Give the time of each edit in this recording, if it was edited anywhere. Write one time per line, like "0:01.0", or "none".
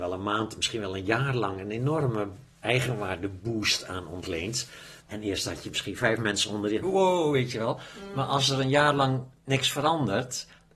0:05.0
0:06.8